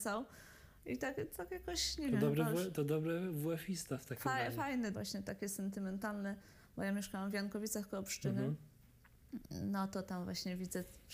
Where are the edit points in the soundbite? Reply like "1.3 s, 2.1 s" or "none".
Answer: 4.9 s